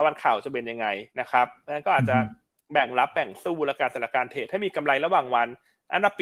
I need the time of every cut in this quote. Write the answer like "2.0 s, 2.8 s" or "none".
1.1 s